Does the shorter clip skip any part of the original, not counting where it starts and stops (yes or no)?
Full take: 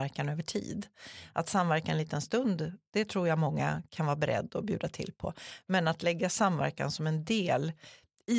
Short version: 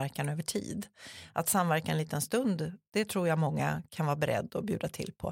no